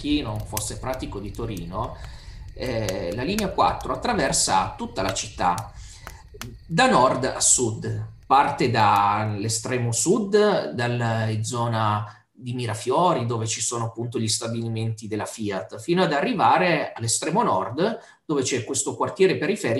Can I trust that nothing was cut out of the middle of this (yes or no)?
yes